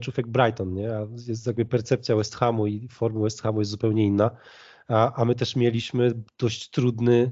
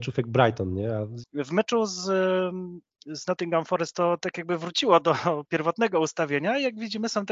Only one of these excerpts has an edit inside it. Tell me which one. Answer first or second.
second